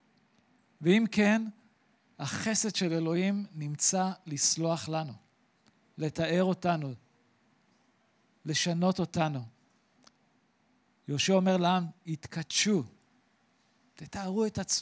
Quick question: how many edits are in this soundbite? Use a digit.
0